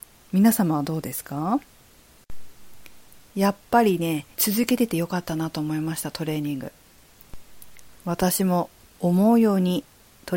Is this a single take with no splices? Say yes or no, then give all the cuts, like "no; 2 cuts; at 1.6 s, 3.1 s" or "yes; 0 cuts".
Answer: no; 1 cut; at 4.3 s